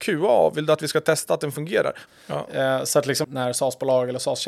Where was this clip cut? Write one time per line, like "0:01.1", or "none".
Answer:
0:02.1
0:03.2